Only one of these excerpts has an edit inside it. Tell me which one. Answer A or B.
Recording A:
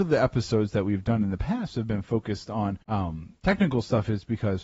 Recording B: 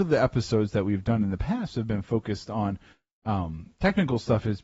A